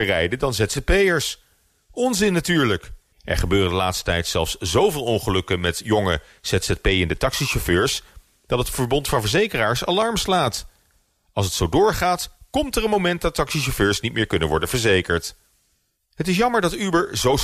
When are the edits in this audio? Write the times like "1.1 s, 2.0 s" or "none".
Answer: 3.1 s